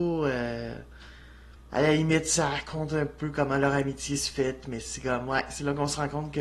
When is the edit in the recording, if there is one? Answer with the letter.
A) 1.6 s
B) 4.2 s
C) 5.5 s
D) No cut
A